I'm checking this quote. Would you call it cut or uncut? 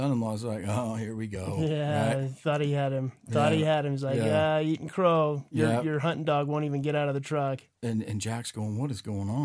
uncut